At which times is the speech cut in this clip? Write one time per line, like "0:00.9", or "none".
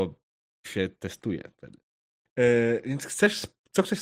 0:02.3